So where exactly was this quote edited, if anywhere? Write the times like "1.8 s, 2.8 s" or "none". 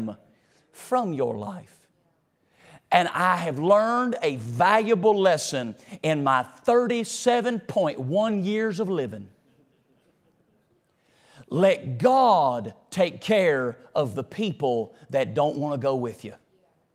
none

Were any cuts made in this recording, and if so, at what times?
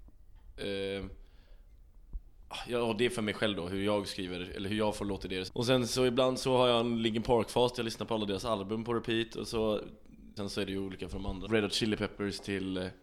5.5 s, 10.4 s, 11.5 s

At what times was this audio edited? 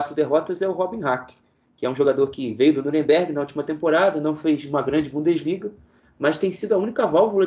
none

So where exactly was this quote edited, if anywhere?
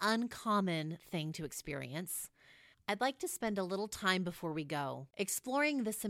2.7 s

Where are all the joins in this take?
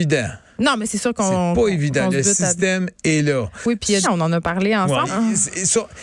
4.0 s, 5.1 s

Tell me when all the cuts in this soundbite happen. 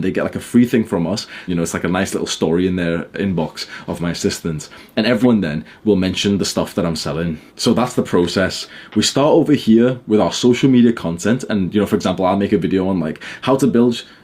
1.5 s, 5.2 s, 7.5 s

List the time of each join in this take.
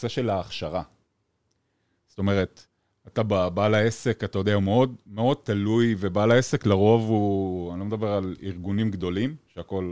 none

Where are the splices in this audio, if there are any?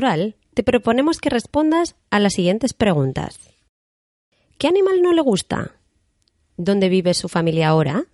none

